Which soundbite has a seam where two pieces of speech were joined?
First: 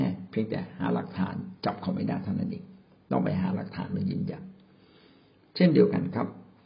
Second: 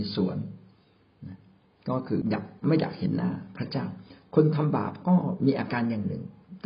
second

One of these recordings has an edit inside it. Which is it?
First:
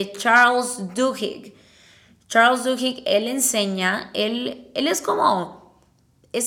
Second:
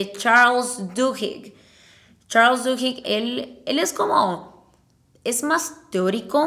second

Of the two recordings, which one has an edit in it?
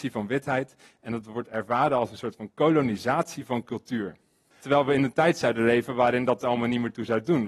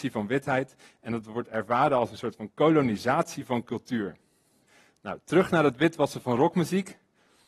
first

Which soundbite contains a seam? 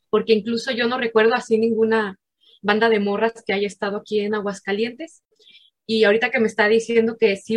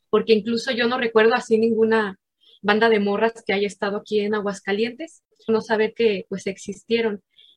second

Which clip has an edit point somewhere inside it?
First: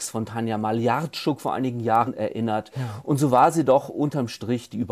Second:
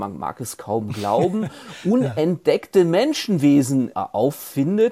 second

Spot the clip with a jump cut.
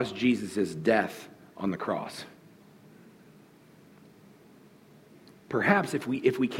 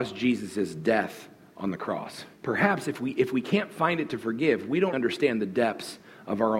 second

